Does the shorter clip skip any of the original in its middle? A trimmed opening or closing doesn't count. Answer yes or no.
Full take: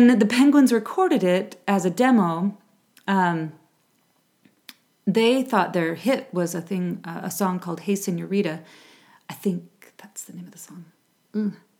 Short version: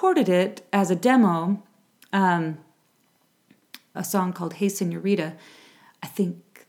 yes